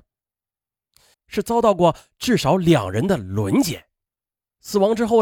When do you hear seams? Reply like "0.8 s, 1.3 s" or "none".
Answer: 1.1 s